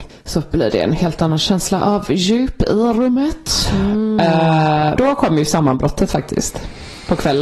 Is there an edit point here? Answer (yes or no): yes